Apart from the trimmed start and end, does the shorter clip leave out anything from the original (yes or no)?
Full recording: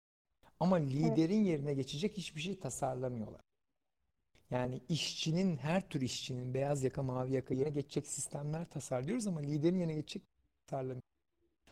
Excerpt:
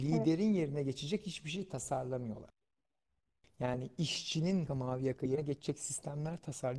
yes